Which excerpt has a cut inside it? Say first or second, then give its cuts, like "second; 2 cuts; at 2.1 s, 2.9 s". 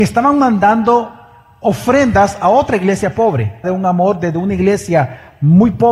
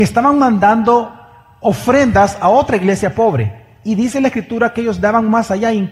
first; 1 cut; at 3.6 s